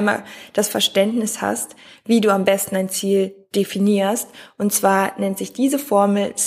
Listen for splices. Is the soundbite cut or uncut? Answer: uncut